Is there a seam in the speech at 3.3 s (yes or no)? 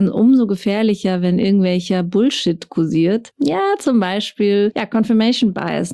yes